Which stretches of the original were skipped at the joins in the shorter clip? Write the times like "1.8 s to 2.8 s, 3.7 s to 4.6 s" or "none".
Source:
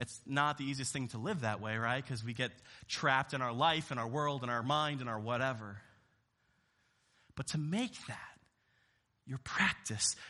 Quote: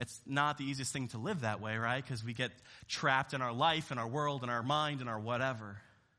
none